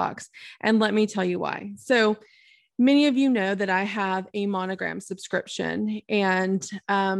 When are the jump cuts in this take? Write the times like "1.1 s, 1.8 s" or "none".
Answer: none